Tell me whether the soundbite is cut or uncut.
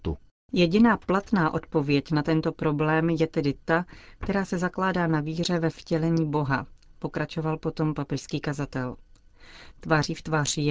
cut